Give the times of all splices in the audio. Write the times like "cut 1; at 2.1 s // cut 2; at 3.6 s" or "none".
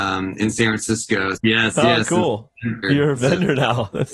cut 1; at 1.4 s // cut 2; at 2.8 s